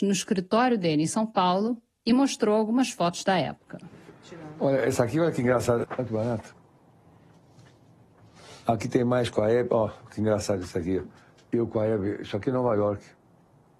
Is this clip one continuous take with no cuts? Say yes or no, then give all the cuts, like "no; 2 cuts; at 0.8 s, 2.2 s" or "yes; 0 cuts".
no; 1 cut; at 5.8 s